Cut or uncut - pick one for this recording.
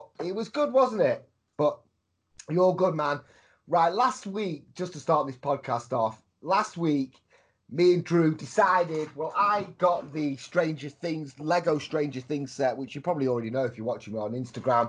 cut